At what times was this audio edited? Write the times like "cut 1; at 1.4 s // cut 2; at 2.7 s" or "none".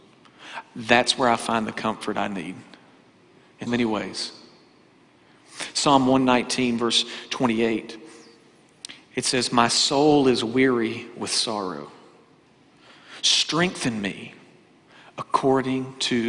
cut 1; at 3.7 s